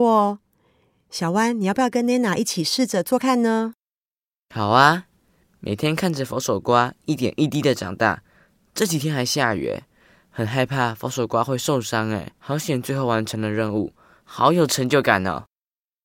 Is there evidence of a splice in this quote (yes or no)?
yes